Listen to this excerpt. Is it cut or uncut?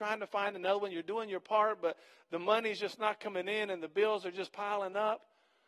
uncut